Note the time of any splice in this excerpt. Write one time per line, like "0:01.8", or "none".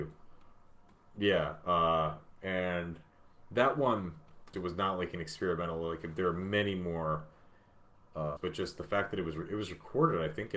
0:04.5
0:08.4